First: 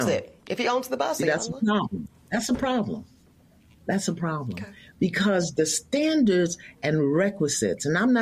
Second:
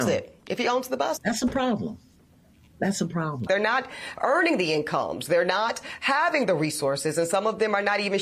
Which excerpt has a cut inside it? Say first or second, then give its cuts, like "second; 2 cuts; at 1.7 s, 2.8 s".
second; 2 cuts; at 1.2 s, 3.5 s